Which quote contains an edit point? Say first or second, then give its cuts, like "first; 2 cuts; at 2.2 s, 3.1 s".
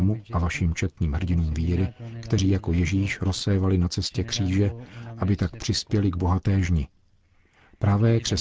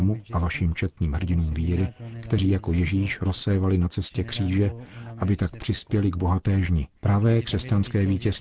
second; 1 cut; at 7.0 s